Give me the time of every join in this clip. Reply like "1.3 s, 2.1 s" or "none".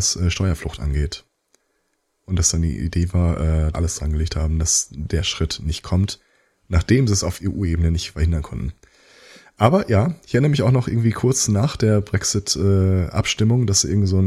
3.7 s